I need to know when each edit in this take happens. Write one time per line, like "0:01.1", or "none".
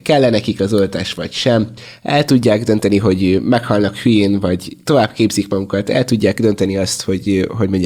none